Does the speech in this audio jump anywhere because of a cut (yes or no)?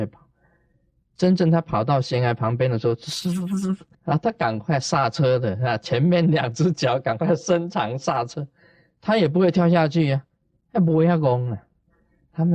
yes